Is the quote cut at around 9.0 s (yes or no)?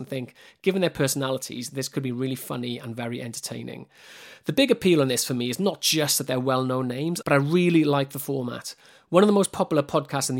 no